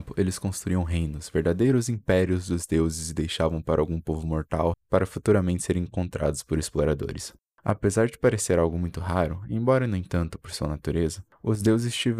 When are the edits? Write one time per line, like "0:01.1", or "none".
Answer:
0:04.7
0:07.4